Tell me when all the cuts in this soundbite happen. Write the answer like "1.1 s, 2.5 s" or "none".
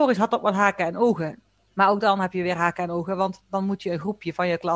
1.6 s